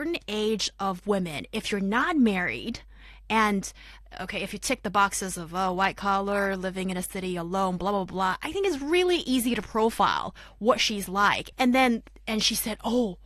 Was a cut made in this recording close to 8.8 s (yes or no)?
no